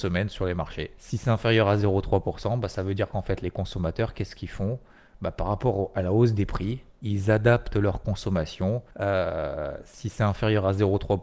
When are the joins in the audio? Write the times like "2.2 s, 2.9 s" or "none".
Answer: 1.0 s, 8.9 s